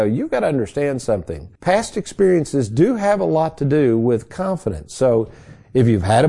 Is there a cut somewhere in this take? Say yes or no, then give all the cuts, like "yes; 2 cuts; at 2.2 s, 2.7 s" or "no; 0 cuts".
yes; 1 cut; at 1.6 s